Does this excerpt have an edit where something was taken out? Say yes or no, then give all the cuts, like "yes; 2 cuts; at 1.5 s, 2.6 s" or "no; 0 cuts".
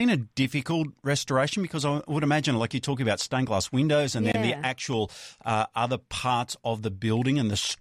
no; 0 cuts